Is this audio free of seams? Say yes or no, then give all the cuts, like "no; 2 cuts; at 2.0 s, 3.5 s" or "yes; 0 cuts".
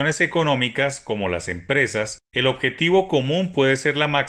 yes; 0 cuts